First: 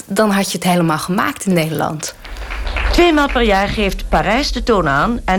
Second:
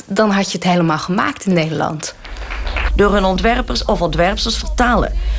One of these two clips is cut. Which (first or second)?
second